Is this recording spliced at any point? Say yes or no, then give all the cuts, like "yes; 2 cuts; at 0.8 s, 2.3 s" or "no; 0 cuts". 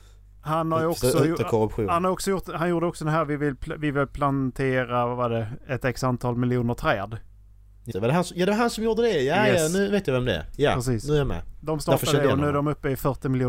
yes; 1 cut; at 7.9 s